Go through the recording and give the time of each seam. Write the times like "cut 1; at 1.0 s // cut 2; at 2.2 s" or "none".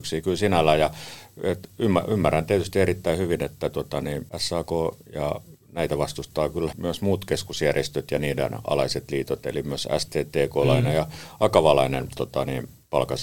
cut 1; at 4.3 s // cut 2; at 6.7 s